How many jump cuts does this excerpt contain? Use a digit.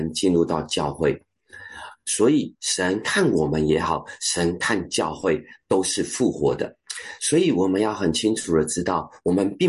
1